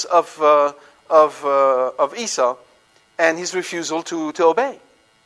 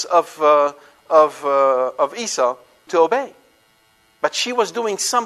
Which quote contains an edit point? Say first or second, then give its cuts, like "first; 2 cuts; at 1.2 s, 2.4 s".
second; 1 cut; at 2.9 s